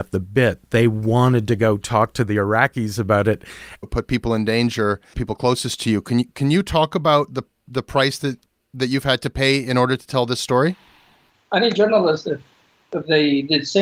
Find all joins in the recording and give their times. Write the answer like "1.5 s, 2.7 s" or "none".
3.8 s